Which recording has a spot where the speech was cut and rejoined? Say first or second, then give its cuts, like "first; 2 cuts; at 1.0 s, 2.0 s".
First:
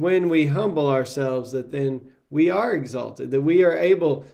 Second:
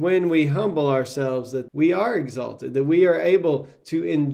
second; 1 cut; at 1.7 s